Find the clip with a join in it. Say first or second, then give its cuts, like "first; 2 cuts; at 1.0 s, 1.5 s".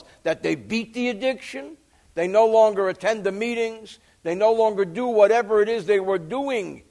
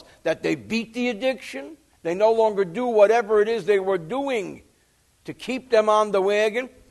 second; 1 cut; at 1.9 s